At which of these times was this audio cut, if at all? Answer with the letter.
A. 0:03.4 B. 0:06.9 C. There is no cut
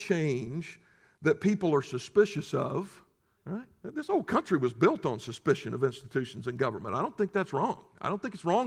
A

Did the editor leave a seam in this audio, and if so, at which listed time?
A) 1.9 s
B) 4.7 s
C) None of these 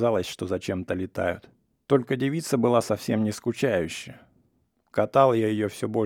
A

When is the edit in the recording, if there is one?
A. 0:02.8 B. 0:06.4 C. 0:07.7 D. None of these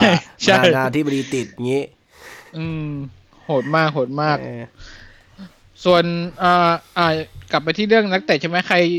D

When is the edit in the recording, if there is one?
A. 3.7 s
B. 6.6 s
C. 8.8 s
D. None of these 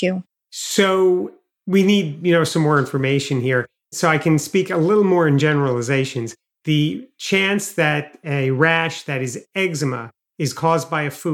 D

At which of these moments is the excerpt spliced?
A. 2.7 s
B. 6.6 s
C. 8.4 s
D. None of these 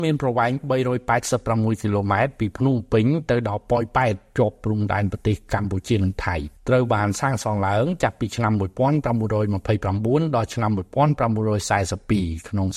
B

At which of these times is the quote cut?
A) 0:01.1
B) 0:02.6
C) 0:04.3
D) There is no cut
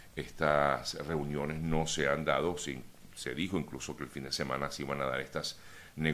D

